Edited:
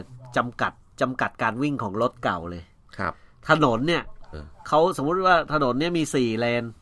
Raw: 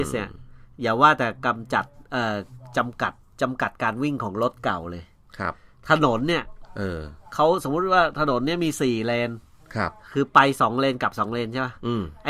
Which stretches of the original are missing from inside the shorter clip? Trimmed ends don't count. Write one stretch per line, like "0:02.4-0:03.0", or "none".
0:06.7-0:07.0

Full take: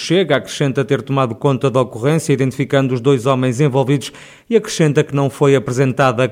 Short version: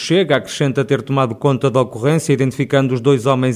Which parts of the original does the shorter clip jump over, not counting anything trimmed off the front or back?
none

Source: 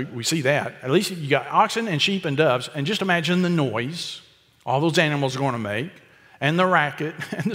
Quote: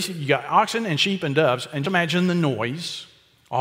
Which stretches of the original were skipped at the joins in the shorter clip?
0:02.9-0:03.0

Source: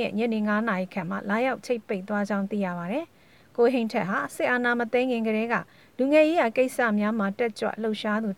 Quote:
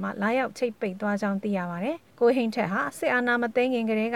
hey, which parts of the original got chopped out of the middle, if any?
0:03.2-0:03.5

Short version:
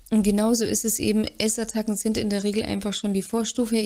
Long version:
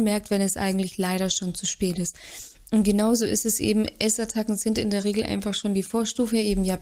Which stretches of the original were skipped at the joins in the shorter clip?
none

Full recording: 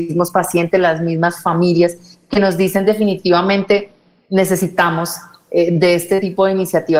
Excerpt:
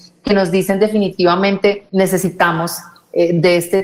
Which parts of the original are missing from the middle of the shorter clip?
0:03.9-0:04.3

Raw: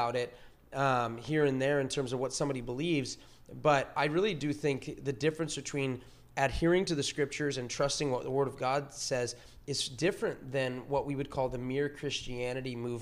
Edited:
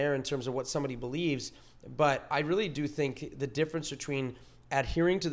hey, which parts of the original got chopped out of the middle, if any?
none

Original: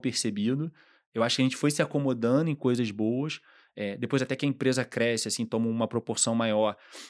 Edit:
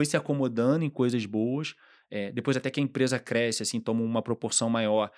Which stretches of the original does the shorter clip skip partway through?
none

